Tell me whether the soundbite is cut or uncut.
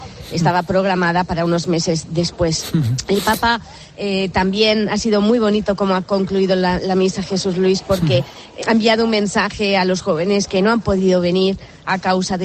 cut